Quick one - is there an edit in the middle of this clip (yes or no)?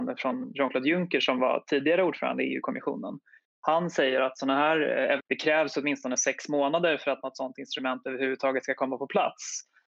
yes